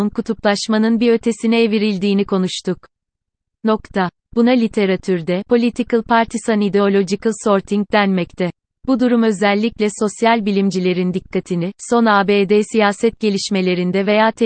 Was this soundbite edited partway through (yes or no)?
no